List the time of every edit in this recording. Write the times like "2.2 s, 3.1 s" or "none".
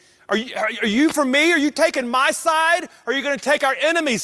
none